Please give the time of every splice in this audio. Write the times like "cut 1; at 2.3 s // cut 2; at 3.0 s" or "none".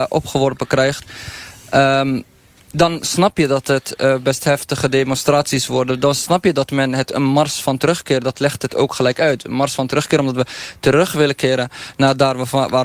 none

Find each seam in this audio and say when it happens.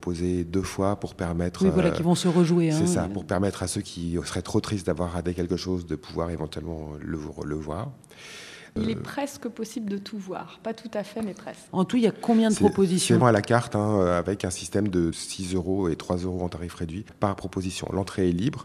cut 1; at 13.2 s // cut 2; at 15.1 s

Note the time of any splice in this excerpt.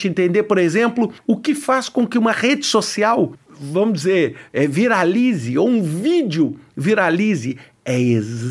none

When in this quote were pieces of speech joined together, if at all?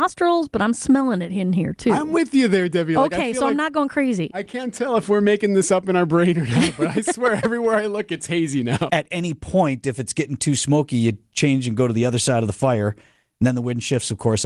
cut 1; at 8.9 s

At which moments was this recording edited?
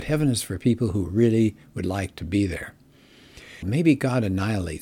cut 1; at 3.6 s

